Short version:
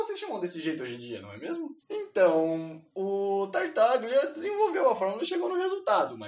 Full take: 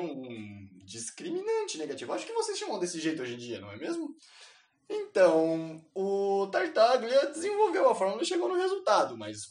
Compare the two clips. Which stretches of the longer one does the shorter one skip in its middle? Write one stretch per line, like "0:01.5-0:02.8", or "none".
0:04.2-0:04.8